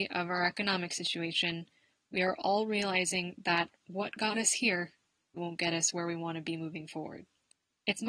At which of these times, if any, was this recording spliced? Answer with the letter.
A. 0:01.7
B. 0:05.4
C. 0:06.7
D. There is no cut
B